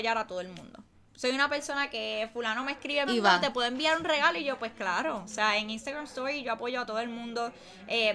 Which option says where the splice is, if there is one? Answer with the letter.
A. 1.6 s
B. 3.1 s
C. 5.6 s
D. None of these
B